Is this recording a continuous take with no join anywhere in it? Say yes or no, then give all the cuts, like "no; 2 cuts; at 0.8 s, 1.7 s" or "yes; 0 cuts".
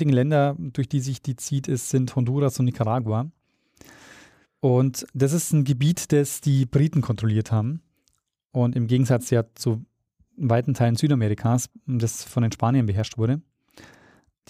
yes; 0 cuts